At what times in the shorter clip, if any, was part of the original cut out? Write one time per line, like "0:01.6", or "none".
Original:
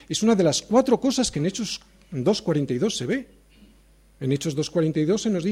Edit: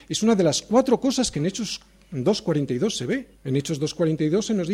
0:03.3